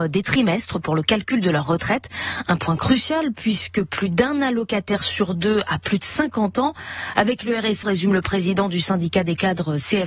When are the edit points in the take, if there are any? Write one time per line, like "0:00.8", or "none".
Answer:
0:07.8